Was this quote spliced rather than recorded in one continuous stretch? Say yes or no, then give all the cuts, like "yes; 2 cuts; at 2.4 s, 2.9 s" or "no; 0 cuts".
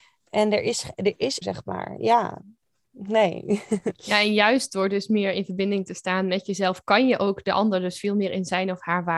yes; 1 cut; at 1.4 s